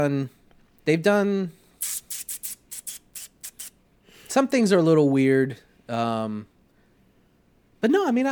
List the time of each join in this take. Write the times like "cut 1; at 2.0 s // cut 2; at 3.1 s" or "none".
none

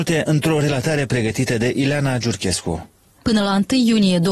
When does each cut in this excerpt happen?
cut 1; at 3.2 s

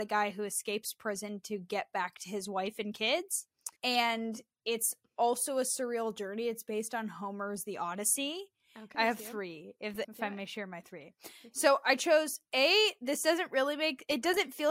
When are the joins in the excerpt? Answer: cut 1; at 3.8 s // cut 2; at 8.9 s // cut 3; at 10.0 s

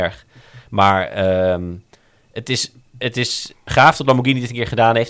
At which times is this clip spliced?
cut 1; at 3.6 s

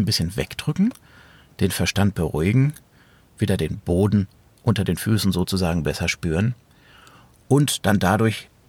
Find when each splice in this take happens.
none

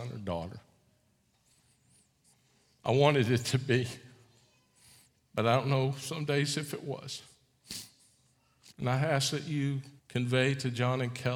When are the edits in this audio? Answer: cut 1; at 8.7 s // cut 2; at 10.0 s

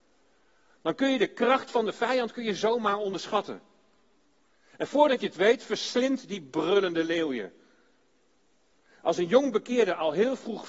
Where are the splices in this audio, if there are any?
none

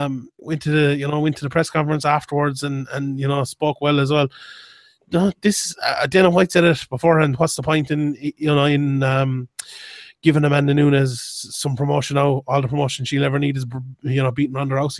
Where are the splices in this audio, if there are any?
none

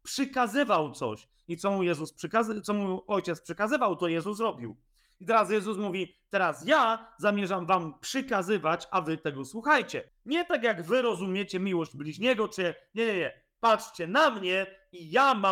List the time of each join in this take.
cut 1; at 10.1 s

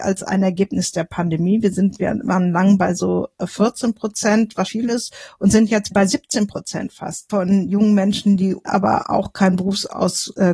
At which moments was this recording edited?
cut 1; at 4.6 s // cut 2; at 8.6 s

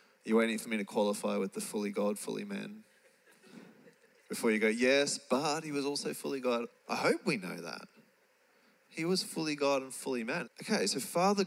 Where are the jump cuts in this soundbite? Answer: cut 1; at 6.7 s // cut 2; at 10.4 s

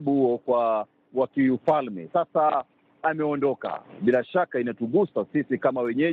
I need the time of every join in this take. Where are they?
none

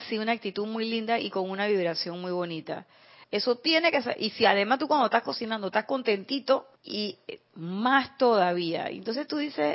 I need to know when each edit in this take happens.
cut 1; at 3.2 s // cut 2; at 6.8 s

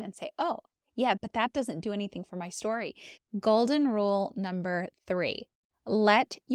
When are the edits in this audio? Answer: cut 1; at 1.2 s // cut 2; at 3.2 s

